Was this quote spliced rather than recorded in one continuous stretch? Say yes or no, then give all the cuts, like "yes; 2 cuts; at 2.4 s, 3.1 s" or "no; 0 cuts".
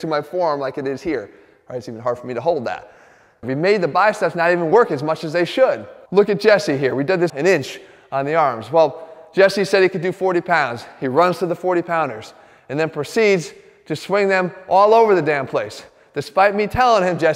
yes; 2 cuts; at 3.4 s, 7.3 s